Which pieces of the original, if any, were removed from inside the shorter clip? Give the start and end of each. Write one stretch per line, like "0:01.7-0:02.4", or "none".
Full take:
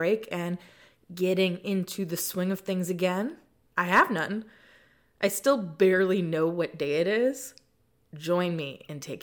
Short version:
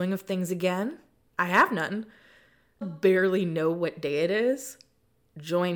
0:05.2-0:05.6

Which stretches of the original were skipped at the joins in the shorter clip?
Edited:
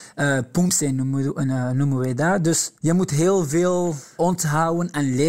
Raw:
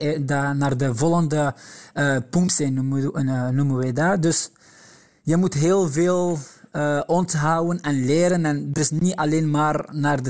0:04.5-0:05.2
0:06.6-0:07.1

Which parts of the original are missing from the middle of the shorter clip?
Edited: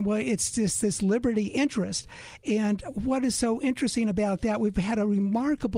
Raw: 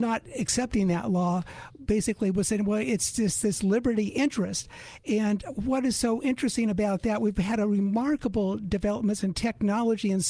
none

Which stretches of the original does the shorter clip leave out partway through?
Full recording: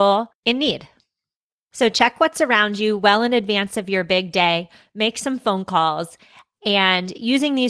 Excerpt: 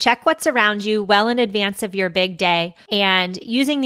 0:04.8-0:06.6

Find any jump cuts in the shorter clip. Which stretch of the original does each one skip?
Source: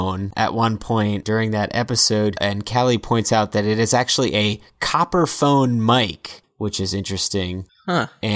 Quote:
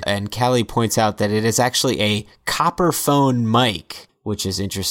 none

